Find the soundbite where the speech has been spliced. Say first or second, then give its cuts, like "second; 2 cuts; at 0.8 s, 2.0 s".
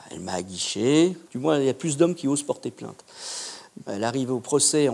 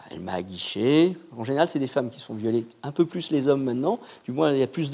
first; 2 cuts; at 1.2 s, 3.9 s